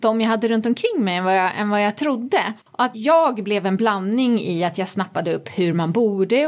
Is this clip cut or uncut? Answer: uncut